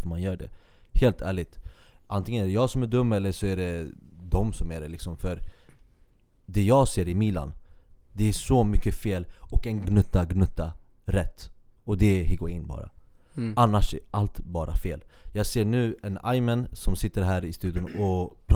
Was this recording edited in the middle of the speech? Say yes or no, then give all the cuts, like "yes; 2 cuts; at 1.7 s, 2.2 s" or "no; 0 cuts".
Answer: yes; 1 cut; at 9.8 s